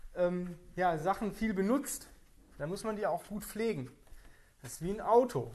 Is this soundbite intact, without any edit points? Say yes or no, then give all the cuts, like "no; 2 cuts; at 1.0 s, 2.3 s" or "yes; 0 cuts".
yes; 0 cuts